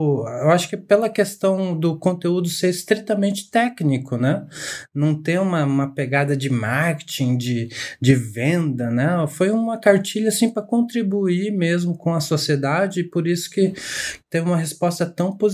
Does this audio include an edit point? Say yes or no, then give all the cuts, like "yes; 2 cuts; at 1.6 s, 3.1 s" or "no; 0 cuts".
no; 0 cuts